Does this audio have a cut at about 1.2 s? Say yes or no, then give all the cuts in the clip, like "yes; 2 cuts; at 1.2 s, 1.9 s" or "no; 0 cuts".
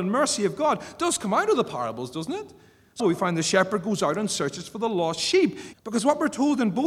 no; 2 cuts; at 3.0 s, 5.7 s